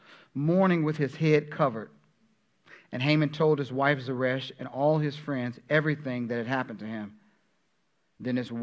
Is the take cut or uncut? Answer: uncut